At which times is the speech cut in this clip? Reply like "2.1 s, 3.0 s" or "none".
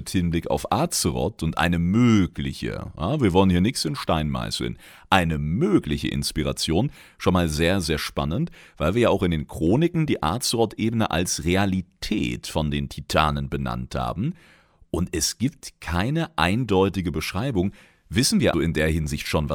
18.5 s